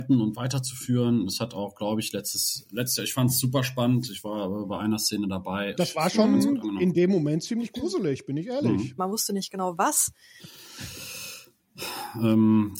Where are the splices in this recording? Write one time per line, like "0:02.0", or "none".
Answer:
0:05.8
0:09.0
0:10.4